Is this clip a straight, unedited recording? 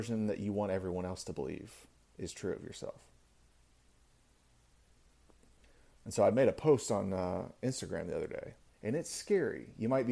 no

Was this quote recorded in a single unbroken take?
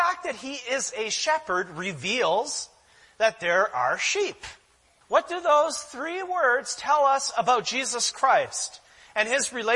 no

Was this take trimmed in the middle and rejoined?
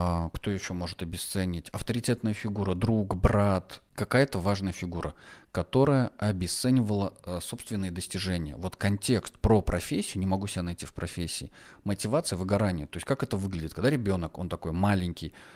no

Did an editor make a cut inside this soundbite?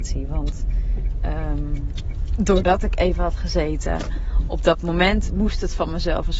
no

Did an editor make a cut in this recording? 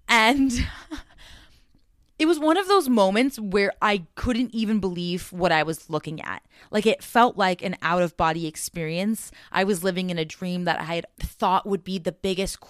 yes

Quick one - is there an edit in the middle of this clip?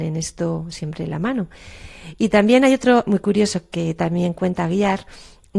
yes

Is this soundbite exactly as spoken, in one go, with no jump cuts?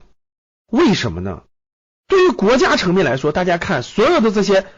no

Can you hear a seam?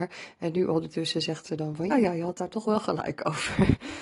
yes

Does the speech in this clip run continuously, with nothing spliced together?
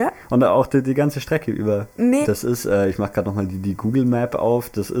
no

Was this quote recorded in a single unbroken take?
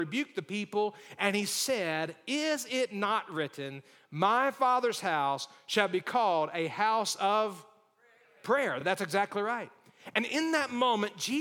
yes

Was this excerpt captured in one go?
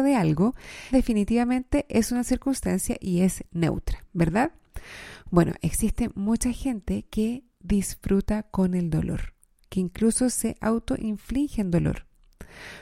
no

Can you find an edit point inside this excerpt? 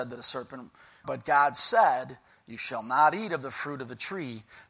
yes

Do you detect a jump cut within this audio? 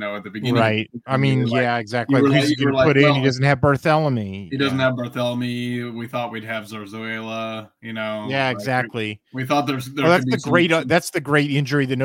no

